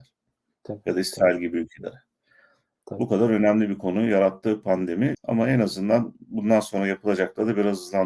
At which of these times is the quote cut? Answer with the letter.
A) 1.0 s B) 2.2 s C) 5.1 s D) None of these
C